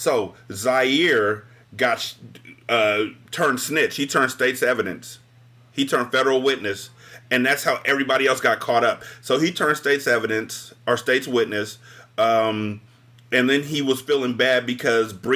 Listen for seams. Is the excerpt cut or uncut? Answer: uncut